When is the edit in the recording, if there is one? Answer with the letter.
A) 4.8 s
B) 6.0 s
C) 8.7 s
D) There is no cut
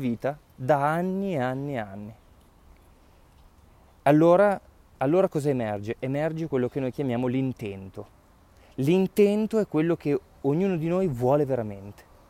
D